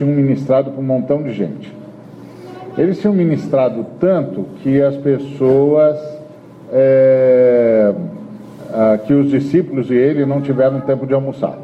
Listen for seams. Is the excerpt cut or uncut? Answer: uncut